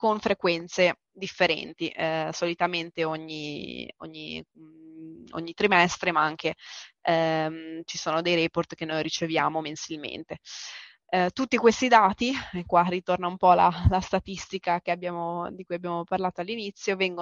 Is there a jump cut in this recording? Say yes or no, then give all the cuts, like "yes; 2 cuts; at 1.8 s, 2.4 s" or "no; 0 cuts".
no; 0 cuts